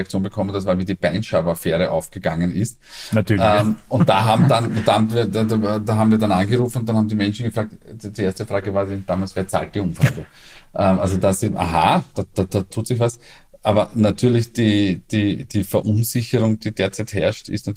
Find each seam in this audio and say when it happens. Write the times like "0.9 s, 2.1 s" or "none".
none